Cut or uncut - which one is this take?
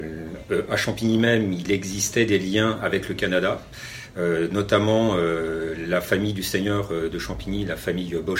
uncut